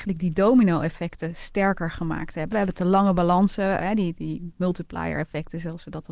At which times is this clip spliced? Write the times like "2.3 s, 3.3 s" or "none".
2.5 s, 3.8 s

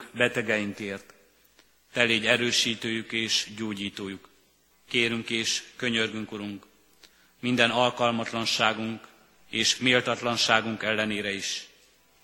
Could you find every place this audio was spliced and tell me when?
4.7 s

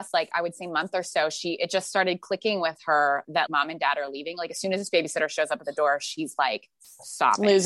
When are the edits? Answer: 3.5 s

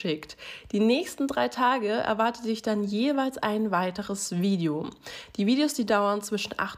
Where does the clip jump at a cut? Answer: none

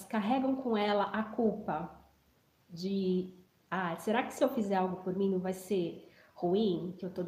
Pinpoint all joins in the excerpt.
none

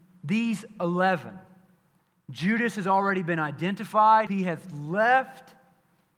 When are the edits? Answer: 4.3 s

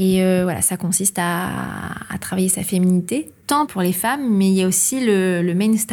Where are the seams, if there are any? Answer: none

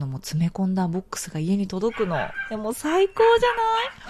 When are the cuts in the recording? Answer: none

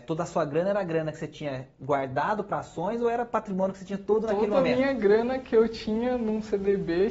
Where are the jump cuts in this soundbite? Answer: none

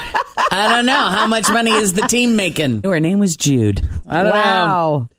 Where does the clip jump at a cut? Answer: 2.8 s, 4.0 s

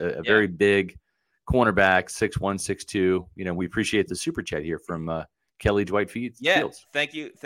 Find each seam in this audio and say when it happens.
none

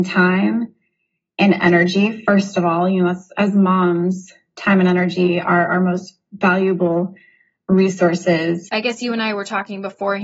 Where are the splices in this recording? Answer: 8.7 s

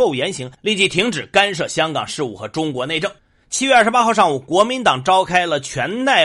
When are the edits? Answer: 3.4 s

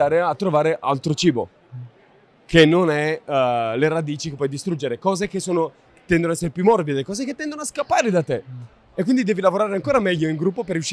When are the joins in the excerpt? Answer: none

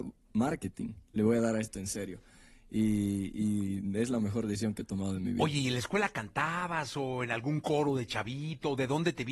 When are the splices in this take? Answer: 1.1 s

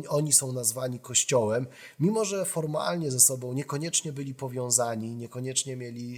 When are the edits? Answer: none

